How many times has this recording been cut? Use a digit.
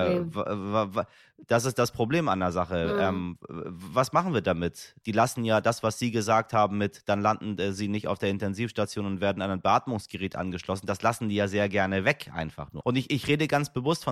2